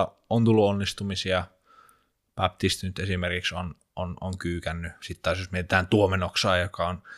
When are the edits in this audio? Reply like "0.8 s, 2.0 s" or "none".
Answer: none